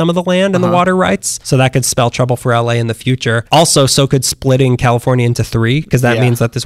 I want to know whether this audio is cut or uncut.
uncut